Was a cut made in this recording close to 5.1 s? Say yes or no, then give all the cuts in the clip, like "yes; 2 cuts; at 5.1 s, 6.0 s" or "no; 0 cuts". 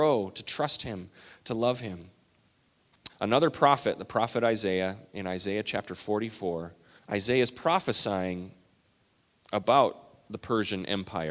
no; 2 cuts; at 3.1 s, 7.0 s